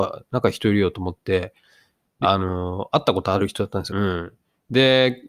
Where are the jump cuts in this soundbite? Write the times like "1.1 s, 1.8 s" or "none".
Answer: 2.2 s, 3.9 s